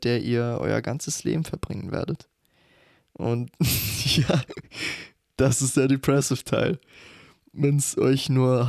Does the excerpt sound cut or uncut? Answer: uncut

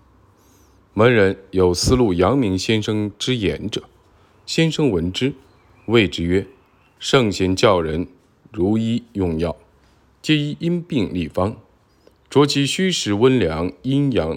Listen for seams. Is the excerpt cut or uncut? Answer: uncut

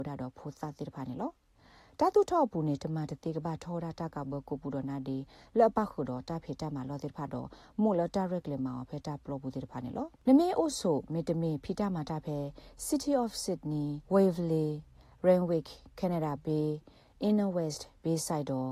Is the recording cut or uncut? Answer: cut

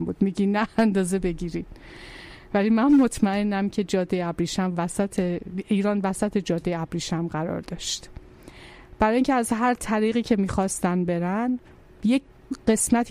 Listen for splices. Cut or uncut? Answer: uncut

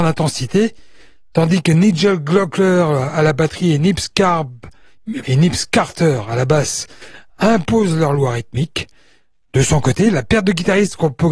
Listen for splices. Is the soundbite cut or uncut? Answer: cut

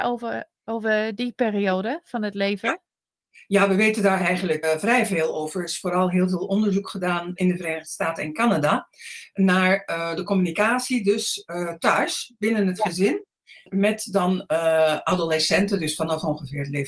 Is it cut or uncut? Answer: cut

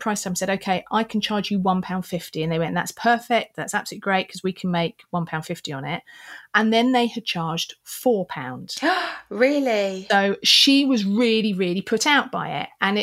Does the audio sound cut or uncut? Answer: uncut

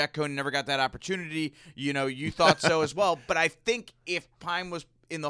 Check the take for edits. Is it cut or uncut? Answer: uncut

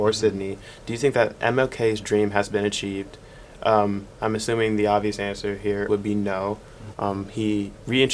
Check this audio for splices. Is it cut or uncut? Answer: cut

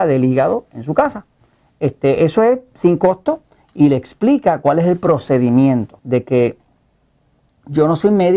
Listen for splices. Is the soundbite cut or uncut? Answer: cut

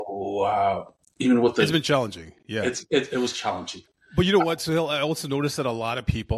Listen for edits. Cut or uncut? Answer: uncut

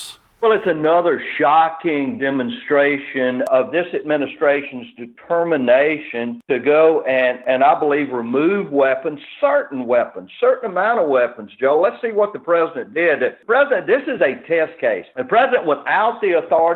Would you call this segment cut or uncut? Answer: uncut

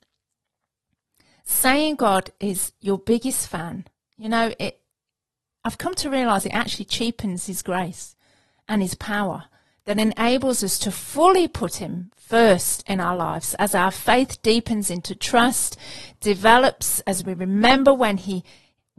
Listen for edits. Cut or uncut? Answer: uncut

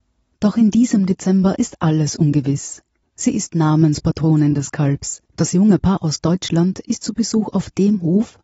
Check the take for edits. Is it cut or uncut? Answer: cut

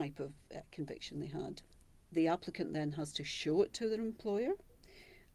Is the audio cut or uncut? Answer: cut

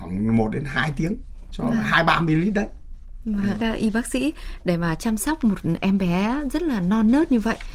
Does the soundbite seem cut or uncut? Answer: cut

